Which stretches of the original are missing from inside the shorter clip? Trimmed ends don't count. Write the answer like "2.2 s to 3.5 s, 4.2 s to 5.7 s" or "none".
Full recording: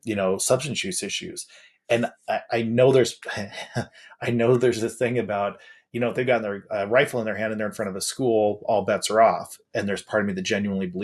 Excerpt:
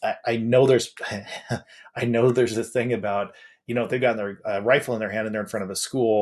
none